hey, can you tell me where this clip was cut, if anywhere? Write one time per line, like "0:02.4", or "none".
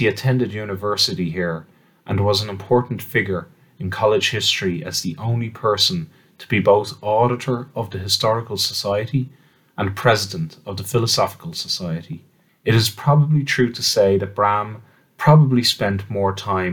0:12.5